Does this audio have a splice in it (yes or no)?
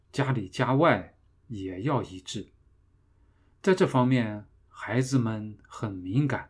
no